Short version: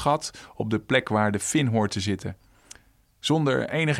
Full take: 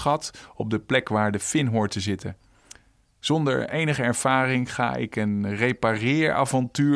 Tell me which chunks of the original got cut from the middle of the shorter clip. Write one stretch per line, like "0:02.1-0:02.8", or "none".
none